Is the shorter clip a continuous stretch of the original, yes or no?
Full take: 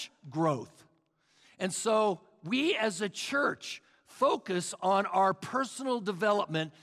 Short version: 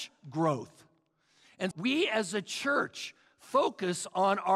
no